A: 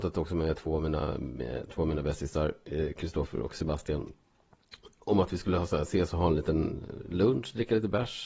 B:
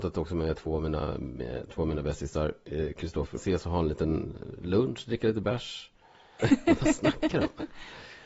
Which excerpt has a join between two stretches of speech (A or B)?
B